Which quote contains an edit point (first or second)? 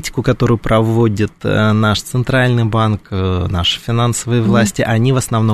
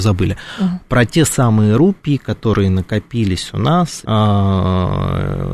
second